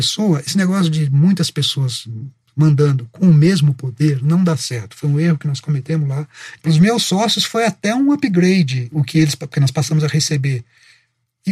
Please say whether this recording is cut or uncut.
cut